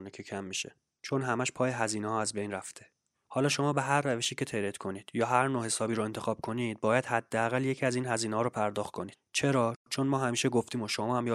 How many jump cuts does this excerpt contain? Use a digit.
2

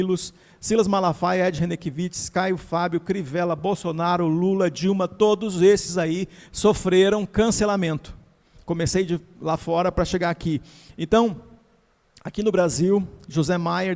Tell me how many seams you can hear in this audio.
1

